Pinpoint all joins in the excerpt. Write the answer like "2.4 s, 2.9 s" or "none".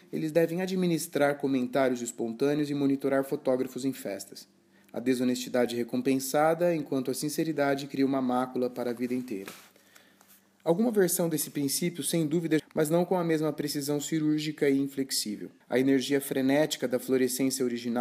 12.6 s, 15.6 s